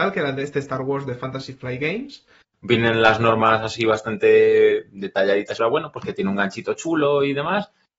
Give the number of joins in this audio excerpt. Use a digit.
2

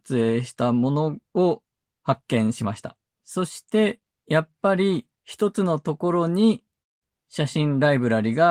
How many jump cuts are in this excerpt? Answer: 2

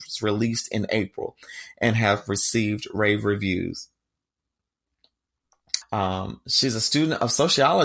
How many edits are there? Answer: 1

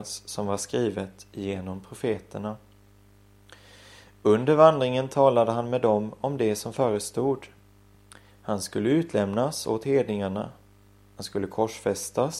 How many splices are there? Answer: 0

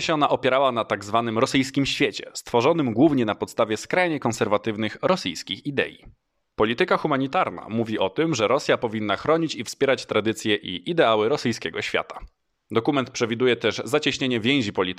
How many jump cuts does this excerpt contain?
2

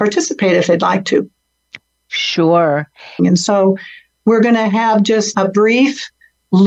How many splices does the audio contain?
2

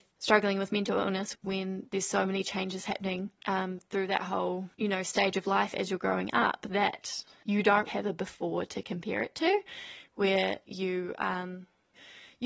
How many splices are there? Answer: 1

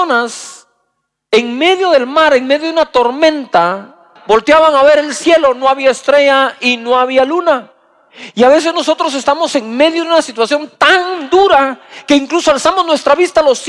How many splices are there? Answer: 1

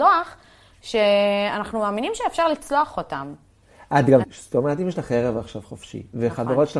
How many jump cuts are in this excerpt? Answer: 1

